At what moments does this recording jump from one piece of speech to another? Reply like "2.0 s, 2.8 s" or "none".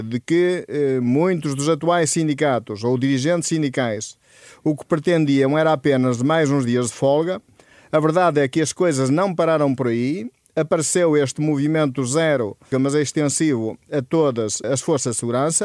12.7 s, 14.6 s